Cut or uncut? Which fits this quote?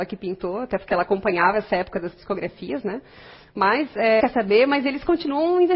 cut